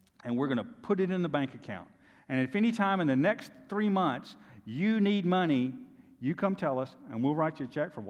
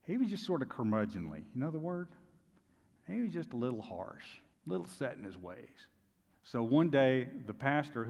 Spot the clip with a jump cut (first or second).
second